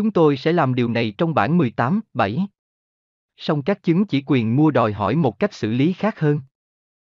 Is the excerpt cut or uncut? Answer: uncut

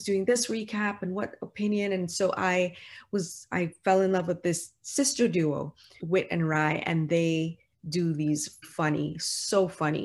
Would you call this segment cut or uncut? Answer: cut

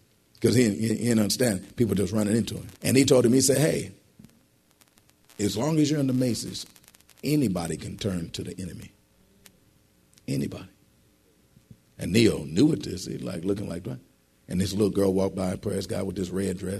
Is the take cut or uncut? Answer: cut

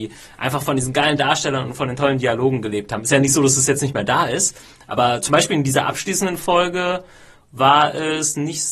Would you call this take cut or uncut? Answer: uncut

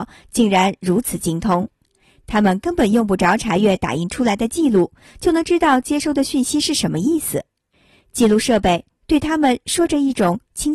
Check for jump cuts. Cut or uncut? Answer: uncut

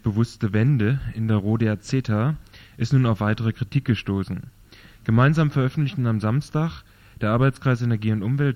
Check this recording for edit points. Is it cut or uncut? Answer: uncut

